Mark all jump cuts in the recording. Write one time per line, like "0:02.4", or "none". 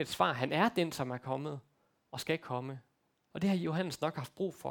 0:03.3